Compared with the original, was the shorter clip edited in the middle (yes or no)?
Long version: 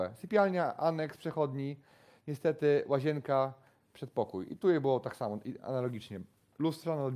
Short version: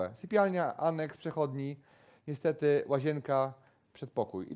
no